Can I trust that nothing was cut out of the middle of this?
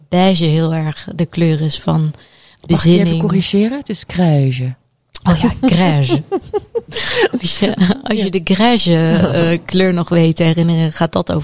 yes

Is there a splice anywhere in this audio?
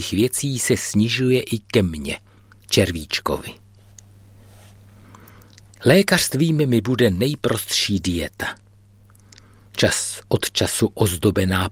no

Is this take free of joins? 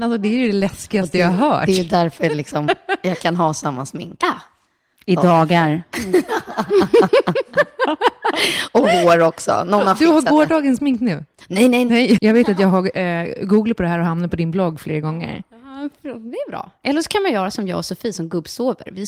no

